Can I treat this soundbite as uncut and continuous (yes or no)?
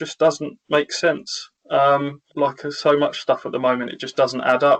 no